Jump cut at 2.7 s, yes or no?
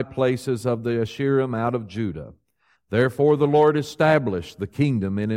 yes